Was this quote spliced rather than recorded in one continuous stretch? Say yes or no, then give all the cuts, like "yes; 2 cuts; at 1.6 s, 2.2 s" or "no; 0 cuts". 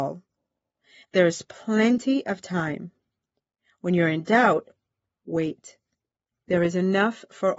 yes; 2 cuts; at 1.0 s, 6.3 s